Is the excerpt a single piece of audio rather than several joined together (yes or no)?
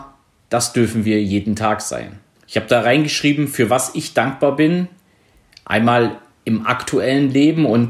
no